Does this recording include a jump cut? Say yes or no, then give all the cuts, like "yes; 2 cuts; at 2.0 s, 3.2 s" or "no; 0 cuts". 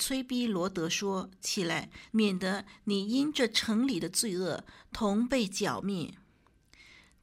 yes; 1 cut; at 2.1 s